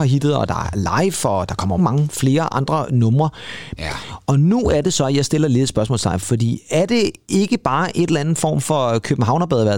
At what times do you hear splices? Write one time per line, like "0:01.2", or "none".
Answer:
0:01.8
0:03.8